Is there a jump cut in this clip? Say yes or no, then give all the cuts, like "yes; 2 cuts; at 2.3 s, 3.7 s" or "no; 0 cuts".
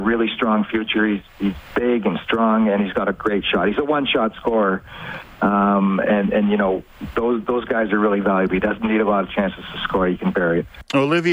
yes; 1 cut; at 6.0 s